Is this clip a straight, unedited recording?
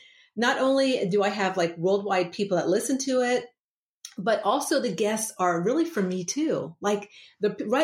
yes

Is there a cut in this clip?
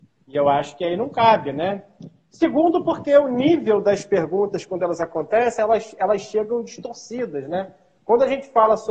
no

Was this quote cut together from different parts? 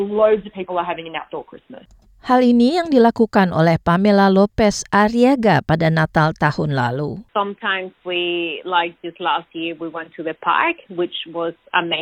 yes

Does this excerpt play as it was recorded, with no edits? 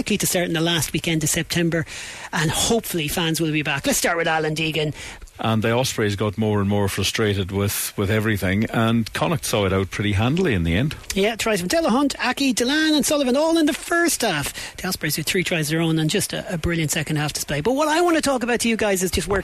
no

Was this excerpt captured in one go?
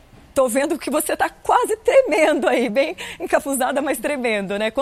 yes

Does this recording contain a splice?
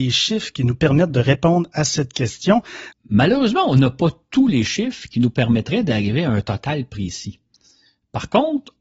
yes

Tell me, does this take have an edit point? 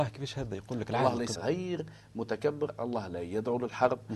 yes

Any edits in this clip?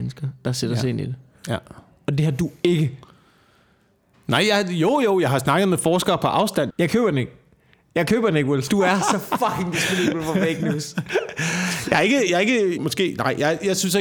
yes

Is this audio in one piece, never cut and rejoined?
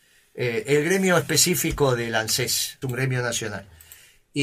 no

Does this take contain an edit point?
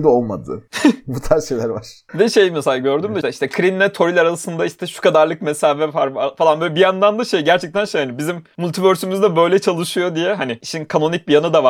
yes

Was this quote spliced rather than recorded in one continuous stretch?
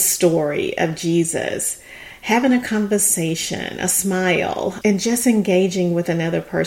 no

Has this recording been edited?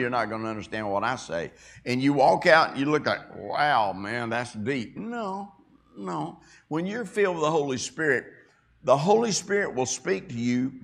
no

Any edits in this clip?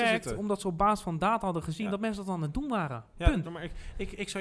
yes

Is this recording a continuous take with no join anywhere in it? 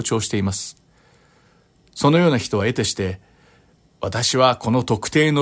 yes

